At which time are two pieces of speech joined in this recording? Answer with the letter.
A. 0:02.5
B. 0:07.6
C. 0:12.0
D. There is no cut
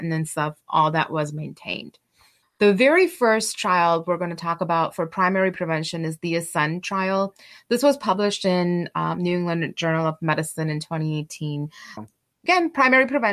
C